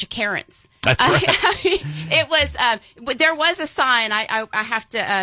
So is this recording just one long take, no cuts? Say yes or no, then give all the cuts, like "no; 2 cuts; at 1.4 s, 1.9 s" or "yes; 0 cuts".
yes; 0 cuts